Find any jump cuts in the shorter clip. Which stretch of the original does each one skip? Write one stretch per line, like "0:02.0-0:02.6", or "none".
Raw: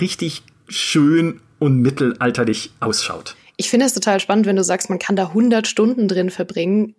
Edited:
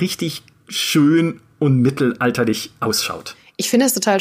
none